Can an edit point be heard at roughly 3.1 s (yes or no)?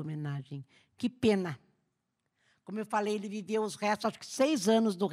no